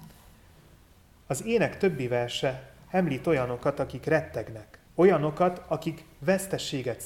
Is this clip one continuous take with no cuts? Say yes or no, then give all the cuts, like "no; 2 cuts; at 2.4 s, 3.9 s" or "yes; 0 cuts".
no; 1 cut; at 4.9 s